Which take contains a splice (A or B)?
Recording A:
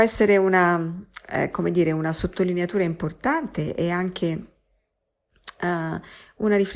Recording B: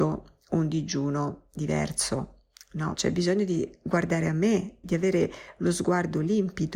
B